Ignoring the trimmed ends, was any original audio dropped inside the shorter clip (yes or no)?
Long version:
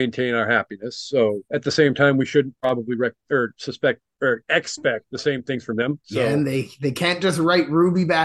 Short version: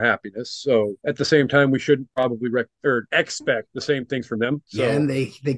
yes